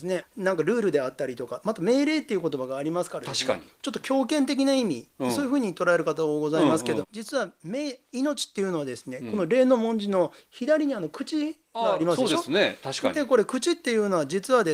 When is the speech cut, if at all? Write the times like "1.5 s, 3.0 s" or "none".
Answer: 7.0 s